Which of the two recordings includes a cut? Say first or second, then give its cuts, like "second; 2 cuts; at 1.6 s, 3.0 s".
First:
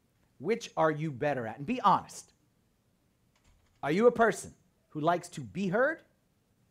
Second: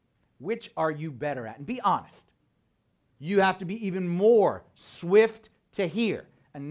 second; 1 cut; at 3.1 s